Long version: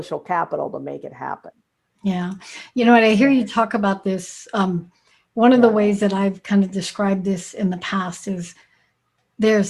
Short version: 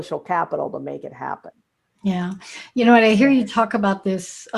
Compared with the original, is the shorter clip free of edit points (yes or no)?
yes